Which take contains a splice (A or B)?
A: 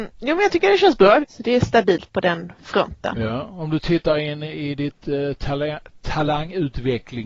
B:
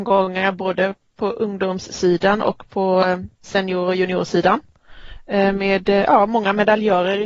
A